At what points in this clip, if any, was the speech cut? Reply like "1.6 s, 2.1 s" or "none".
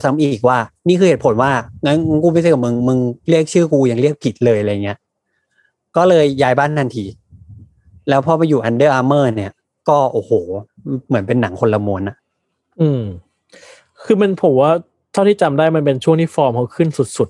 none